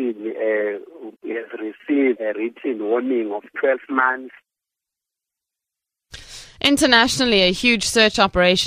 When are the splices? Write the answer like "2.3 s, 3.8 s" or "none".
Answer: 1.2 s, 2.2 s